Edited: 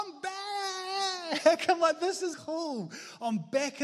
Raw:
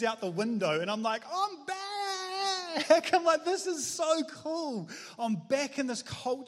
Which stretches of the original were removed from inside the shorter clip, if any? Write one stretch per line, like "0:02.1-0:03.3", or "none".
0:03.8-0:04.3